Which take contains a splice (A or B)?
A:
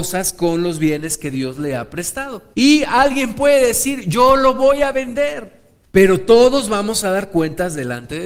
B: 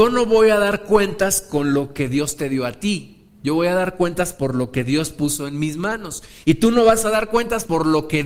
A